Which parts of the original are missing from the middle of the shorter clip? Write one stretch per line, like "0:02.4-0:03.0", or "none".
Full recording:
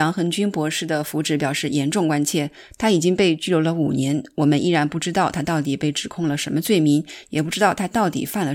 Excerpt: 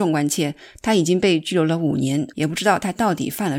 0:04.3-0:07.3